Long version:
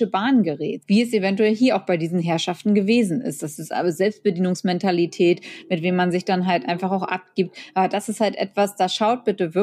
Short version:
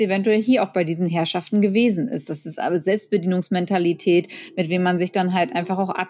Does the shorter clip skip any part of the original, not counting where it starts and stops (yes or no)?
no